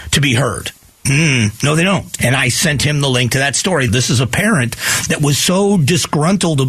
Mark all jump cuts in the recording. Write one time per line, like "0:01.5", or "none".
0:02.2
0:03.9